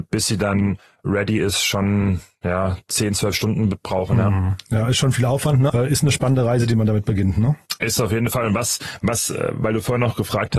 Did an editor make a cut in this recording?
yes; 1 cut; at 5.7 s

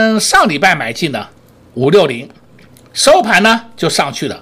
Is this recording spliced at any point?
no; 0 cuts

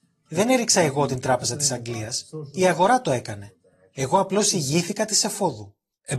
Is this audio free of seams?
yes; 0 cuts

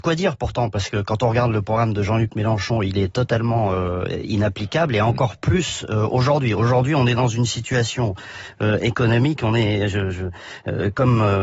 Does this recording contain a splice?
no; 0 cuts

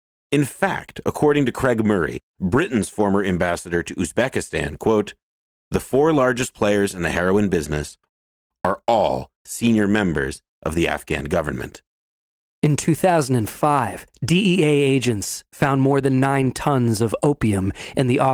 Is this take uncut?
yes; 0 cuts

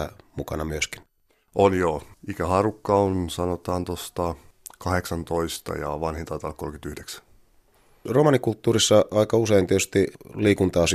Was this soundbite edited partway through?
no; 0 cuts

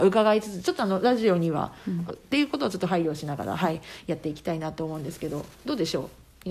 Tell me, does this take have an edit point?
yes; 1 cut; at 2.1 s

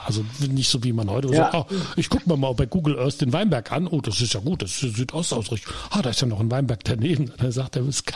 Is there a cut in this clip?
no; 0 cuts

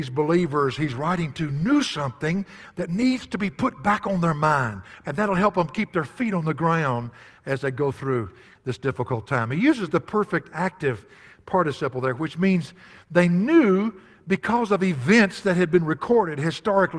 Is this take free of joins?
no; 1 cut; at 5.0 s

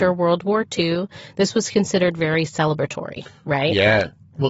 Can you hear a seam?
no; 0 cuts

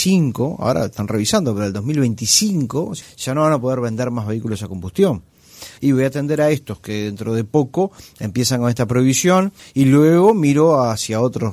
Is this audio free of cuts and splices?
no; 3 cuts; at 3.0 s, 5.8 s, 9.6 s

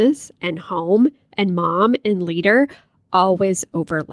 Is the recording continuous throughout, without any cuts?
yes; 0 cuts

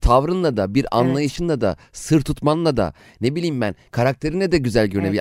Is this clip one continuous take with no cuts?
yes; 0 cuts

